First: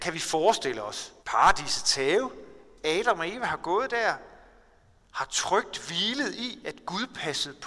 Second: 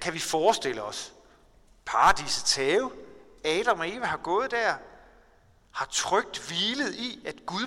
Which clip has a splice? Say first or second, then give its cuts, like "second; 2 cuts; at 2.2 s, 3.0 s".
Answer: first; 1 cut; at 1.2 s